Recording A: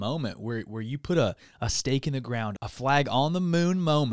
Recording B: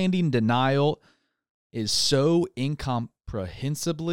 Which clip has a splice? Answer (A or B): A